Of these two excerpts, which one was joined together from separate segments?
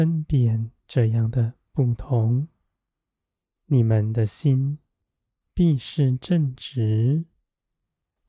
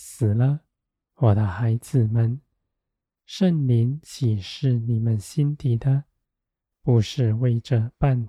second; 1 cut; at 1.0 s

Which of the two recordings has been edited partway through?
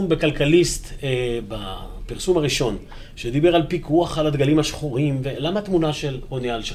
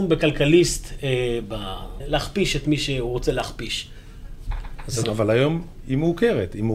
second; 2 cuts; at 2.0 s, 5.0 s

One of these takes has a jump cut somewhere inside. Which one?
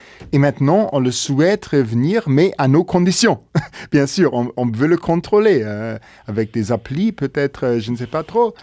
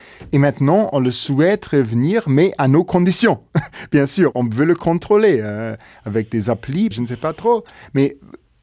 second; 2 cuts; at 4.3 s, 6.9 s

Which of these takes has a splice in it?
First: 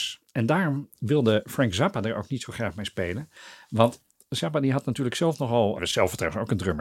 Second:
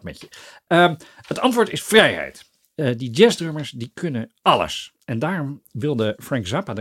first; 1 cut; at 5.8 s

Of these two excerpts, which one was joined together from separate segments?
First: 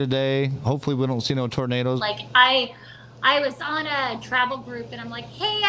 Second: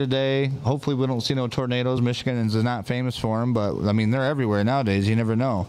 first; 1 cut; at 2.0 s

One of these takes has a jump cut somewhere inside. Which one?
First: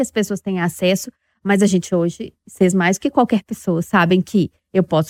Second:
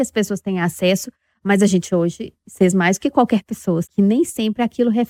second; 1 cut; at 3.8 s

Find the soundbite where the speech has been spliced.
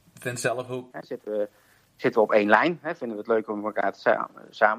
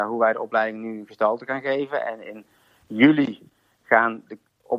first; 1 cut; at 0.9 s

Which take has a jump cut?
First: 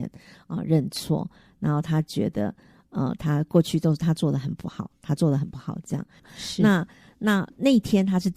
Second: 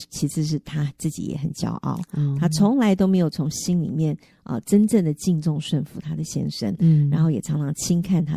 first; 1 cut; at 6.2 s

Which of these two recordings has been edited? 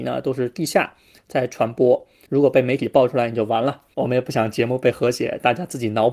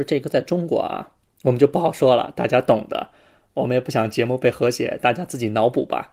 first; 2 cuts; at 2.3 s, 3.9 s

